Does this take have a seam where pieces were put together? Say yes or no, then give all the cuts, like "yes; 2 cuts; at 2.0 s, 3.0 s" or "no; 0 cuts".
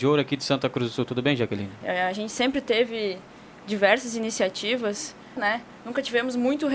yes; 2 cuts; at 1.8 s, 5.4 s